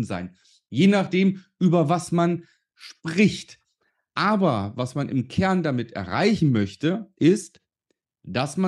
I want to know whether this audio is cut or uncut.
uncut